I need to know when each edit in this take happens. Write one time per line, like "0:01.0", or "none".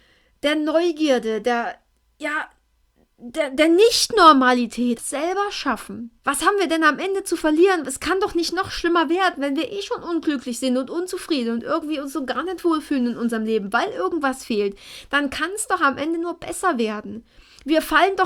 0:05.0
0:06.2